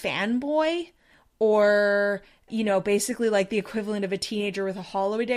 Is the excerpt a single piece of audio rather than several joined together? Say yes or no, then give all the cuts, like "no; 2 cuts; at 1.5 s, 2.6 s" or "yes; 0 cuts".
no; 1 cut; at 2.5 s